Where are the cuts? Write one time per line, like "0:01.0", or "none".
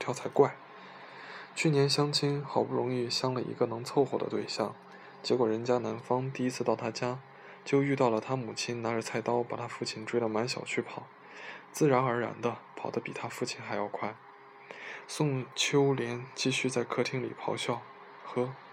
0:12.7
0:15.1